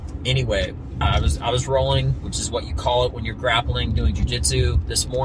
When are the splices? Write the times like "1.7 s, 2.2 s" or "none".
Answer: 1.0 s